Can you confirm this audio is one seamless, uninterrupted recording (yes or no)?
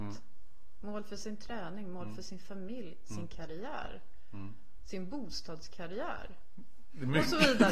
yes